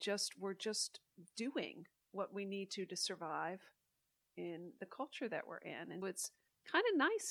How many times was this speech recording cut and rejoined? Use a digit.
1